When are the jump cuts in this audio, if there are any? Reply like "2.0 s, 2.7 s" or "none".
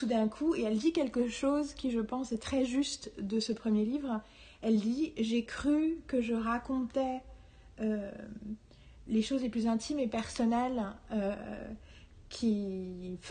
9.1 s